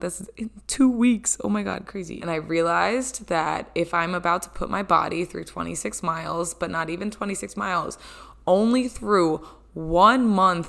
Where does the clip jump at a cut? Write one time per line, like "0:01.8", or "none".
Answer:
0:02.2